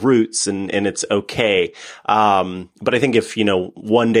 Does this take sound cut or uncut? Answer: uncut